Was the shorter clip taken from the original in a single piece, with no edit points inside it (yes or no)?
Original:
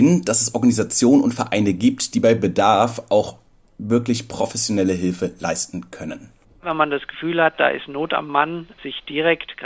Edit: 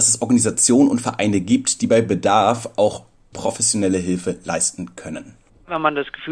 no